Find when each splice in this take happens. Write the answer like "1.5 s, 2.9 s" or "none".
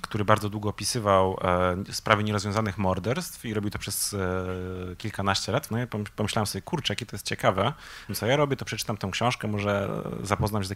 5.7 s, 8.1 s